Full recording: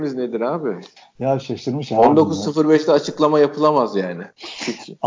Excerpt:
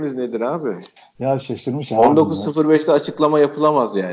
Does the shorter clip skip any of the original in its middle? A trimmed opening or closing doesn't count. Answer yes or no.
no